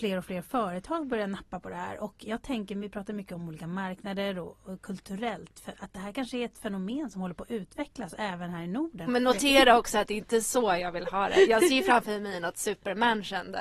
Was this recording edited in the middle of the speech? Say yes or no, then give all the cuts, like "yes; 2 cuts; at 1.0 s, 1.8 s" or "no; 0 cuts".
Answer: yes; 1 cut; at 9.1 s